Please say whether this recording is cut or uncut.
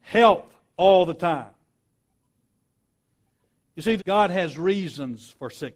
cut